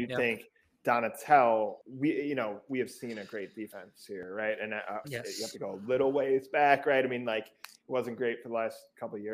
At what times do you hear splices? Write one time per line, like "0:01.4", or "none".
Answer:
0:01.8
0:05.0